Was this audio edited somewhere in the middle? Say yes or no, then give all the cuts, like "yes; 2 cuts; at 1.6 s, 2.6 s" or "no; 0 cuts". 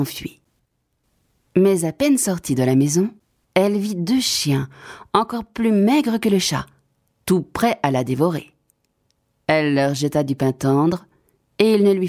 no; 0 cuts